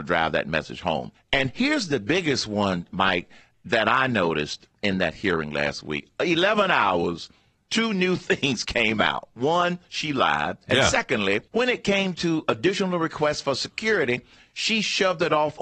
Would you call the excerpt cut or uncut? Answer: cut